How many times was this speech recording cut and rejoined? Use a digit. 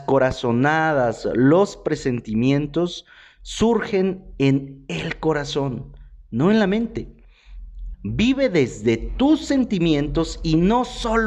1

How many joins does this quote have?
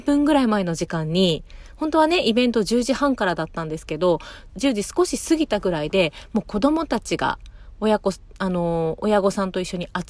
1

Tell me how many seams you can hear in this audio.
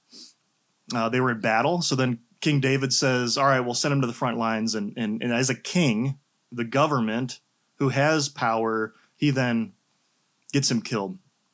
0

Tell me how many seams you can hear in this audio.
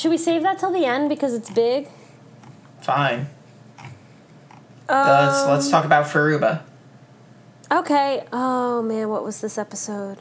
0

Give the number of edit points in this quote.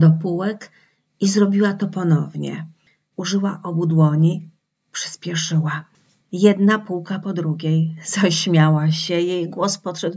1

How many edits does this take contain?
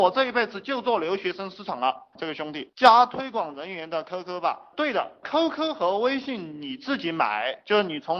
1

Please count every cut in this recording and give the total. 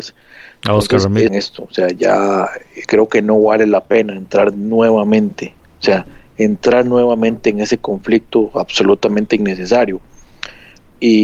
2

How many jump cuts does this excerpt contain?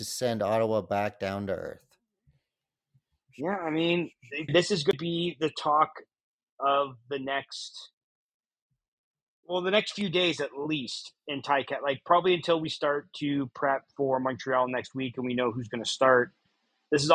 1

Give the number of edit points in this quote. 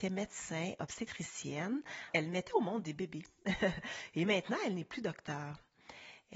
1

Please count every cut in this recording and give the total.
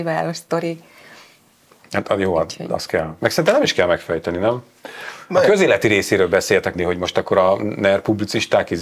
2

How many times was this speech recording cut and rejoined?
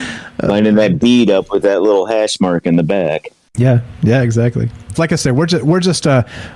1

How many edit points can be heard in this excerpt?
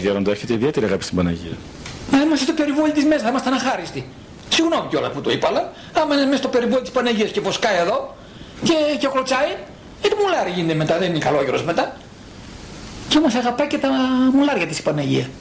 1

